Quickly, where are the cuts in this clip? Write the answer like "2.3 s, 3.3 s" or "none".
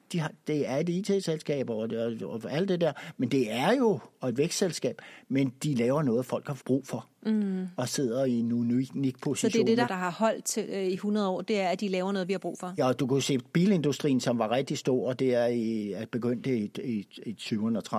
6.6 s, 9.9 s, 12.8 s